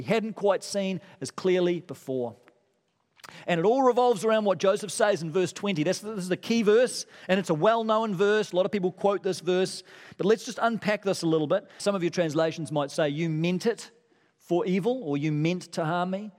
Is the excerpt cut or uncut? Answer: cut